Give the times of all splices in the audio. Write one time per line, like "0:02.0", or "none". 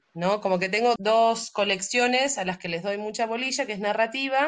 0:01.0